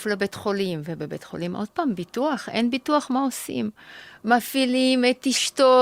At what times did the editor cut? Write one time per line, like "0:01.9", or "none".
none